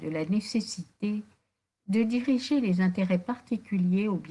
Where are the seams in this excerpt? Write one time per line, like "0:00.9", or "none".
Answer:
none